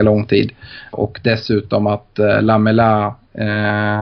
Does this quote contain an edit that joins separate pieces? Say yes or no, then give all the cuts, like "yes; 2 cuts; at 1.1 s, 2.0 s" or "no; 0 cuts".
yes; 1 cut; at 0.9 s